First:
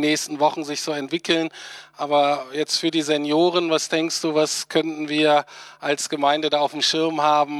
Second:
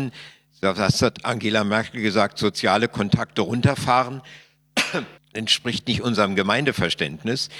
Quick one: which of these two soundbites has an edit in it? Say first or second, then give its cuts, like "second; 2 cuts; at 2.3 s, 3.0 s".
second; 1 cut; at 5.2 s